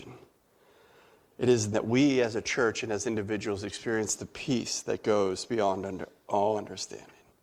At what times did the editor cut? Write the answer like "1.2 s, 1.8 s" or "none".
1.7 s